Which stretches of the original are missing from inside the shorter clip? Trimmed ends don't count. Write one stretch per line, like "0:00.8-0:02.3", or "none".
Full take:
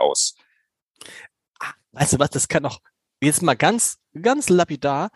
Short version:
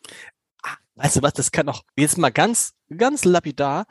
0:02.9-0:03.1